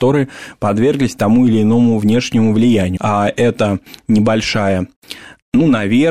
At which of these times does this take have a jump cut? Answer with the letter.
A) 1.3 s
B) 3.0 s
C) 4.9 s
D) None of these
B